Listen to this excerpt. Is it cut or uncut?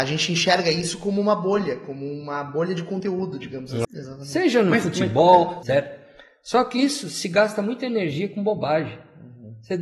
cut